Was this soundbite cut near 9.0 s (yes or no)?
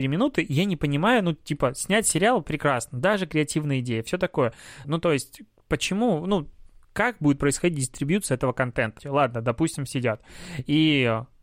yes